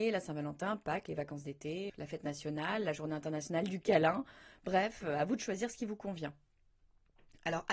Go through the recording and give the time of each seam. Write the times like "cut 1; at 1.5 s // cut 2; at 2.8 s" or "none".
cut 1; at 1.9 s